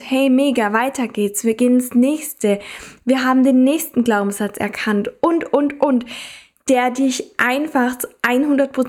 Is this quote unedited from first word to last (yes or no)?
yes